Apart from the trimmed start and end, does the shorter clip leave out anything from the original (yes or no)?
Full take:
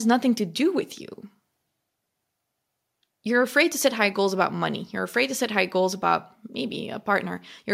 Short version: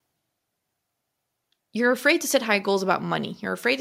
no